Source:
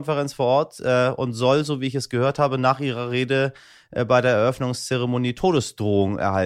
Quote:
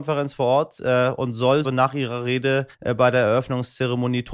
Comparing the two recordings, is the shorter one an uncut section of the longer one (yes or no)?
no